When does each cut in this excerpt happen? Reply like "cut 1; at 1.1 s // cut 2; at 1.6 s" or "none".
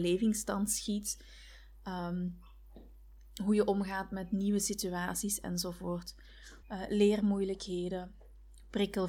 cut 1; at 6.6 s